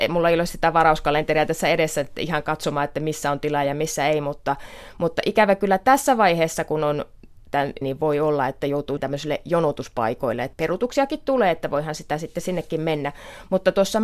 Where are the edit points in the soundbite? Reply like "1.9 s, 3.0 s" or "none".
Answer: 7.8 s